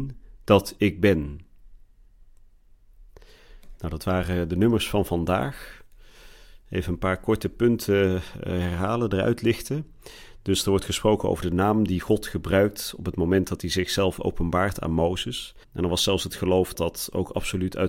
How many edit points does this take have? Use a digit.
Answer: 2